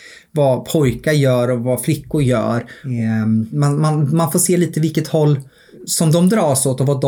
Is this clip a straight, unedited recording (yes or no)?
yes